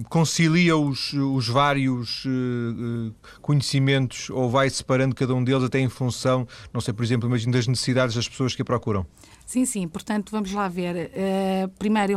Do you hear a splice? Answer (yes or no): no